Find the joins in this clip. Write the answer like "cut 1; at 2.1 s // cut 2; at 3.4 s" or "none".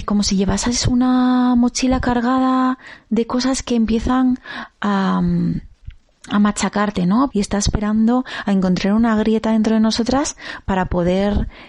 cut 1; at 7.3 s